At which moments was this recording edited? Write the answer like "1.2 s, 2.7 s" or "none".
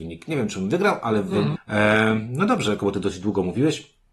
1.6 s, 2.8 s